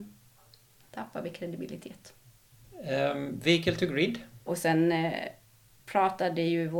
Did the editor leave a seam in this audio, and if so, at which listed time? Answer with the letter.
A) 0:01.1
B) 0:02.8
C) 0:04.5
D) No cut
C